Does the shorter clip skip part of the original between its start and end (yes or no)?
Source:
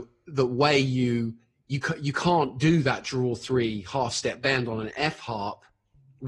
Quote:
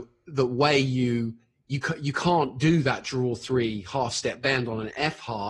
no